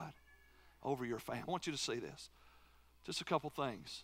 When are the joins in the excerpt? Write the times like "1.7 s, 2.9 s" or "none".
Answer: 1.5 s